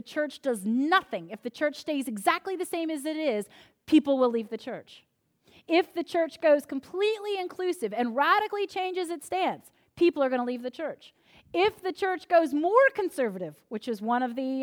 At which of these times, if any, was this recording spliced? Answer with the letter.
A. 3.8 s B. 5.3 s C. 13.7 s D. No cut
D